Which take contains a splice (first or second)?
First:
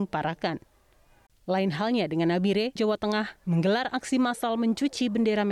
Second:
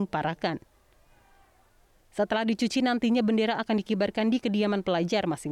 first